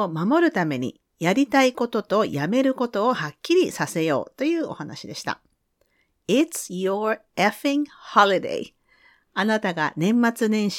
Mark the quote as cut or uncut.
uncut